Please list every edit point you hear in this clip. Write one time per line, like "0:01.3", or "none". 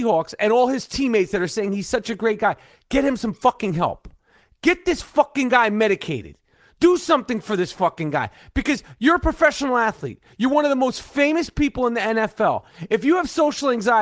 none